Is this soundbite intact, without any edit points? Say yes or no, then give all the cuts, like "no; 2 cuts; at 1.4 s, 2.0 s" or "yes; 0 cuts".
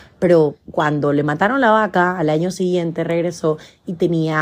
yes; 0 cuts